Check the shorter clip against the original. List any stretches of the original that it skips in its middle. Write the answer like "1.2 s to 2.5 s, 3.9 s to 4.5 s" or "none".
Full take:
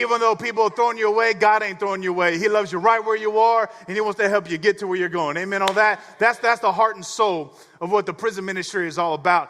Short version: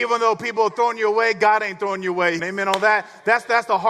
2.4 s to 5.3 s